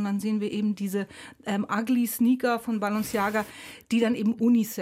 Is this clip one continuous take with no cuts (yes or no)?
yes